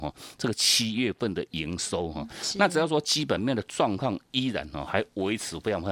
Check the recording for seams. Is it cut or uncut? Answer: uncut